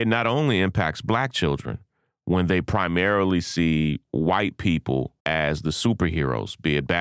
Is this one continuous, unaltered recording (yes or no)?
no